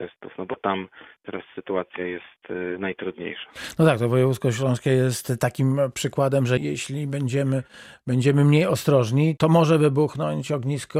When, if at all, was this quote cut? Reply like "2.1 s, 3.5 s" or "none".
6.6 s, 9.4 s